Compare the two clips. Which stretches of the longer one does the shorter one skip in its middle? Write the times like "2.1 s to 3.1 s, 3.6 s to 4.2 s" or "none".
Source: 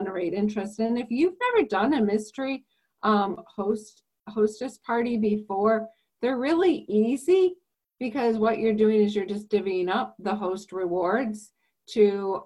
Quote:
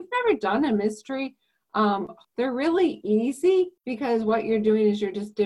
3.5 s to 6.1 s, 7.6 s to 7.9 s